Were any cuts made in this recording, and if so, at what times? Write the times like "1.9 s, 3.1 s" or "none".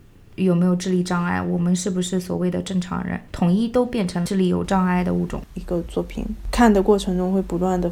5.5 s

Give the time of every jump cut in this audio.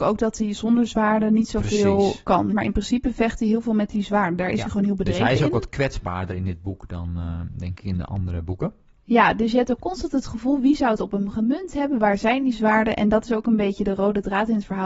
2.5 s

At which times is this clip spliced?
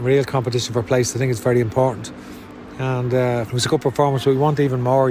3.5 s

